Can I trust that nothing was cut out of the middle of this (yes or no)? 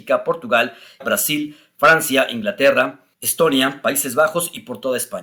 no